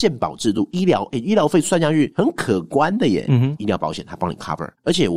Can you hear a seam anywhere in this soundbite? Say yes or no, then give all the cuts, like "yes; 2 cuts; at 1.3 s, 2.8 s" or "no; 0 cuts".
yes; 1 cut; at 3.6 s